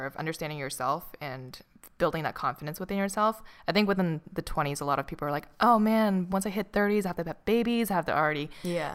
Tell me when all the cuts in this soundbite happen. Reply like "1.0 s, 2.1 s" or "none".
none